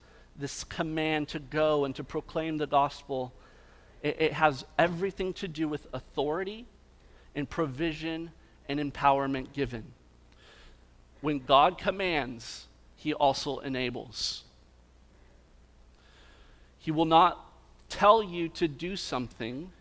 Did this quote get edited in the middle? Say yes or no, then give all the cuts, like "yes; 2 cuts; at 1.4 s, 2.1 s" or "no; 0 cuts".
yes; 1 cut; at 11.1 s